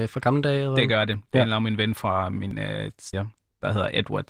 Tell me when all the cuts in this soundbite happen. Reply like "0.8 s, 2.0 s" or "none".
3.1 s